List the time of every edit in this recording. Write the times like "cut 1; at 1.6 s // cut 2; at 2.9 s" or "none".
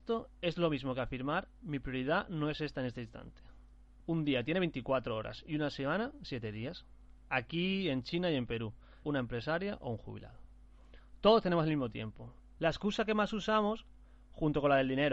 cut 1; at 4.0 s // cut 2; at 9.0 s // cut 3; at 12.6 s